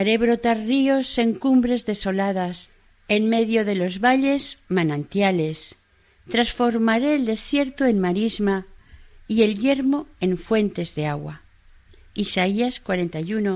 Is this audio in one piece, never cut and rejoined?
yes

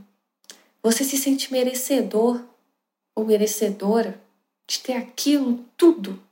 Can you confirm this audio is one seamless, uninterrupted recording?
yes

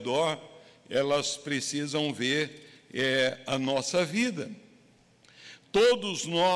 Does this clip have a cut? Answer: no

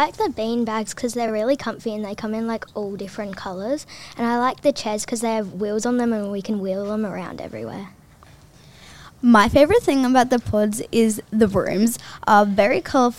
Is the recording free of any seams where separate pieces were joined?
yes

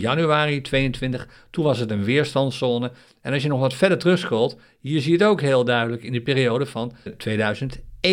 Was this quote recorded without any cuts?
no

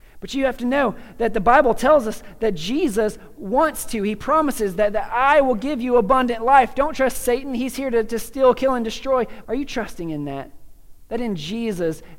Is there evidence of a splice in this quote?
yes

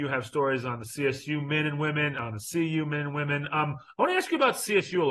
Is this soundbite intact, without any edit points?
yes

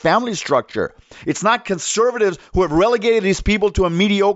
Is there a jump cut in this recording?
no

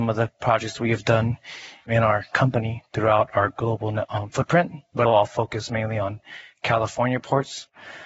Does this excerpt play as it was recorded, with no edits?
no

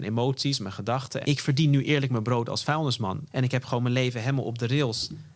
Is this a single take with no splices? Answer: no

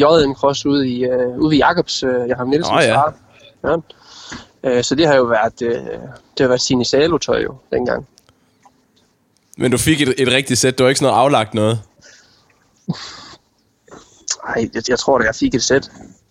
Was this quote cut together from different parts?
no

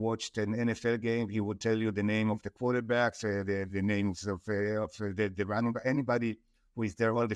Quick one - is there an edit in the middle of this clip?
no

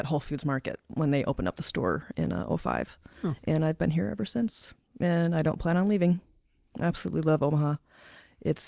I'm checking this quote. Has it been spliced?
no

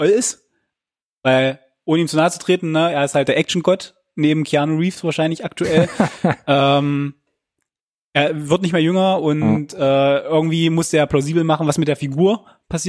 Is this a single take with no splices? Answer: yes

